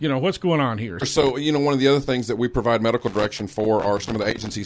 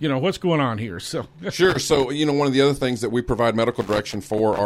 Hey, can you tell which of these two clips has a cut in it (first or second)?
first